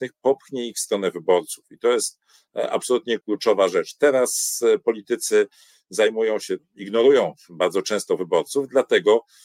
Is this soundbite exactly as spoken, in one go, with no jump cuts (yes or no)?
no